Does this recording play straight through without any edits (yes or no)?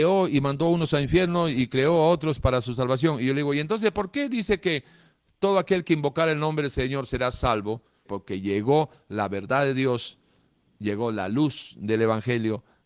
no